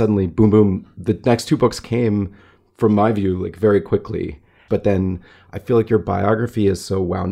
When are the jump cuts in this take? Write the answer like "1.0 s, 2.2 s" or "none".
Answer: 4.7 s